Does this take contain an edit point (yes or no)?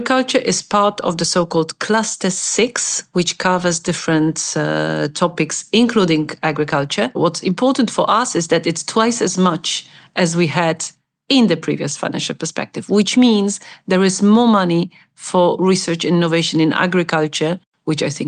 yes